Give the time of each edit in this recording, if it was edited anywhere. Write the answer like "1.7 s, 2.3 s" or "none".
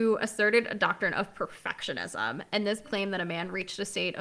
2.8 s